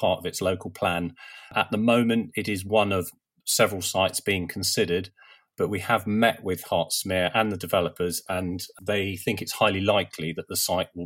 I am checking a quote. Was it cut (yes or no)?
no